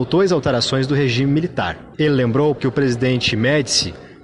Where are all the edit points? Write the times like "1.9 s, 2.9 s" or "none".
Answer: 2.6 s